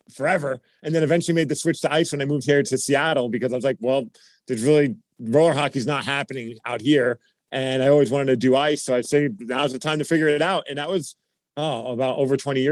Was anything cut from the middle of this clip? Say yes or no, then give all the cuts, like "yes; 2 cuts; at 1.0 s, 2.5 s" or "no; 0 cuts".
no; 0 cuts